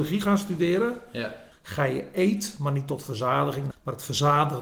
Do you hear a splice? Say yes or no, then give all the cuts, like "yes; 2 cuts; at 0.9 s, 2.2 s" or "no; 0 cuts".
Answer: yes; 2 cuts; at 1.5 s, 3.7 s